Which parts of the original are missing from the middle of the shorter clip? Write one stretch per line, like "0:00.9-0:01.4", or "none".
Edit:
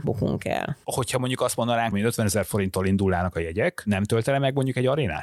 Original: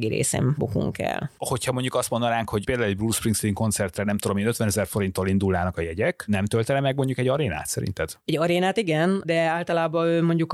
0:02.5-0:04.3

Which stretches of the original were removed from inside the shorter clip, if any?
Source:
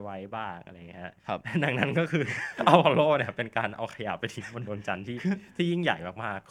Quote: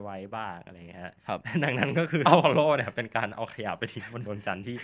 0:02.2-0:02.6

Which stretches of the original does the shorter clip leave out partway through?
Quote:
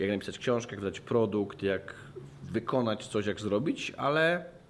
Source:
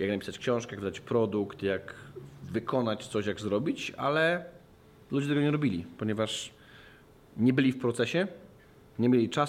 none

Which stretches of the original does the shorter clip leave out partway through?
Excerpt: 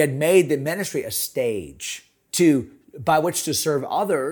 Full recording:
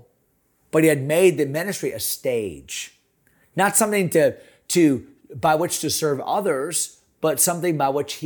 0:03.2-0:04.6

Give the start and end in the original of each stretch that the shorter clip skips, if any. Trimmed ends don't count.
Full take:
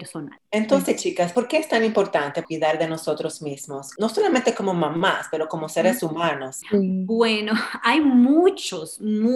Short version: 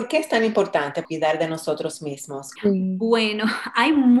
0:03.9-0:06.6

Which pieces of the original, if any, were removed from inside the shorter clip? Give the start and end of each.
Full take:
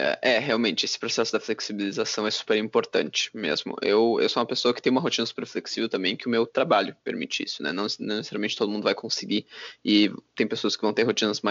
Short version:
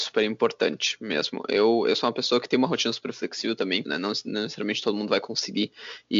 0:06.2-0:07.6

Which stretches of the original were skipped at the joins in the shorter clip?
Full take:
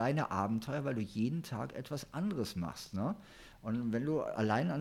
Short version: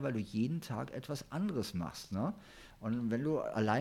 none

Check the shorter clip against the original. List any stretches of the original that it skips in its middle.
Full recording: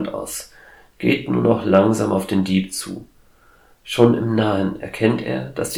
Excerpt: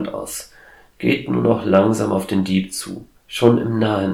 0:03.2-0:03.7

